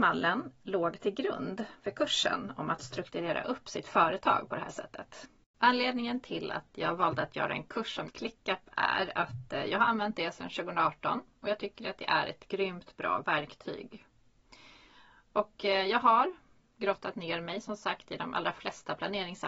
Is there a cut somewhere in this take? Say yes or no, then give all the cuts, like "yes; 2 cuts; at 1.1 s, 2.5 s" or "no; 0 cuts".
yes; 1 cut; at 8.1 s